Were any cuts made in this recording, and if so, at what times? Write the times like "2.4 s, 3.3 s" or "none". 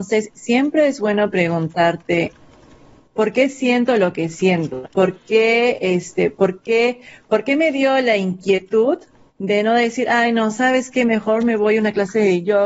4.8 s